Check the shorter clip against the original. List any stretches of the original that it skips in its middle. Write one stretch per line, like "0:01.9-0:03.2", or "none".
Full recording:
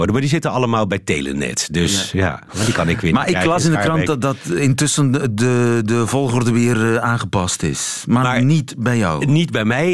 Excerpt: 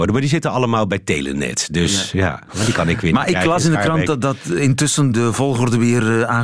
0:05.1-0:05.8